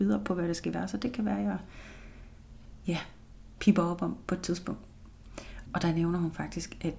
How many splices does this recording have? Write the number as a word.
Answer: one